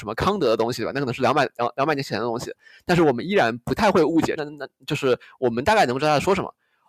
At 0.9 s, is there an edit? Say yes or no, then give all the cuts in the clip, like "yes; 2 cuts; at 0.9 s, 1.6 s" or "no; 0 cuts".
no; 1 cut; at 4.4 s